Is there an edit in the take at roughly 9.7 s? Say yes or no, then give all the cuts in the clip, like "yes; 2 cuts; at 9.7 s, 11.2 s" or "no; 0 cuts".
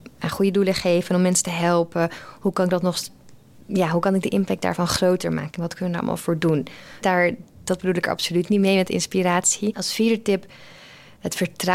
yes; 2 cuts; at 7.0 s, 9.7 s